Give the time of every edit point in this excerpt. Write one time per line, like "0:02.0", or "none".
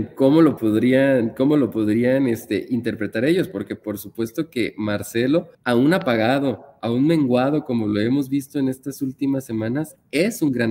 0:05.5